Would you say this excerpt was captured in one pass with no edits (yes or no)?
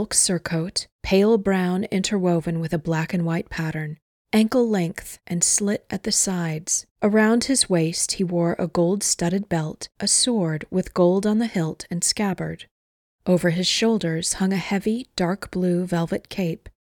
no